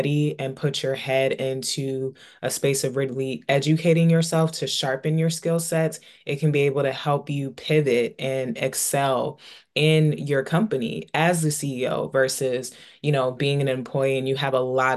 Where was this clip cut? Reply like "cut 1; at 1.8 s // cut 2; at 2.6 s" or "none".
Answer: none

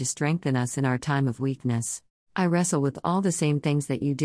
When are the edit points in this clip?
cut 1; at 2.3 s

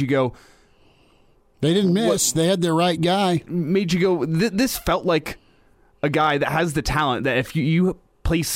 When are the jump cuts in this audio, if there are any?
none

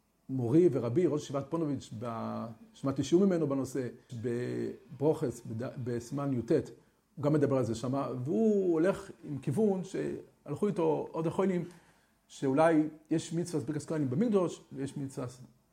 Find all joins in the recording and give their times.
cut 1; at 4.1 s

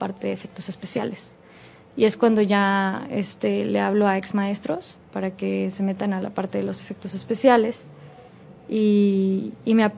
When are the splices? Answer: none

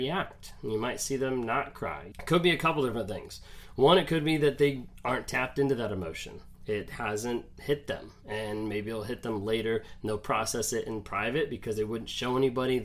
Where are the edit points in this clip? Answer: cut 1; at 2.1 s

